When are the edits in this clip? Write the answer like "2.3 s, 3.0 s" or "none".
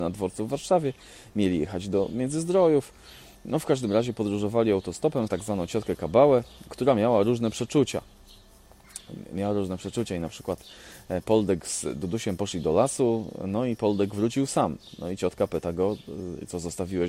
5.3 s